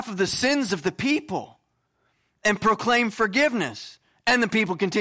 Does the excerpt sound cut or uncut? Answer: uncut